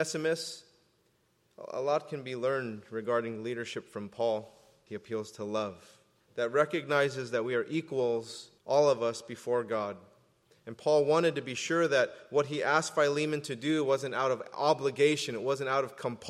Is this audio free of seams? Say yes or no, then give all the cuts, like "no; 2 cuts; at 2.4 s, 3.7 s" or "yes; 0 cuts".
no; 3 cuts; at 4.9 s, 6.2 s, 8.6 s